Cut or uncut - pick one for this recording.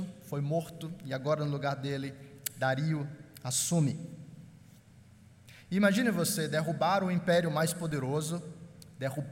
uncut